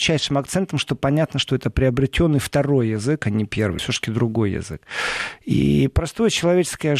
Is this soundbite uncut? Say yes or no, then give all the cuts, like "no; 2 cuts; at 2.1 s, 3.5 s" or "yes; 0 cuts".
no; 1 cut; at 3.8 s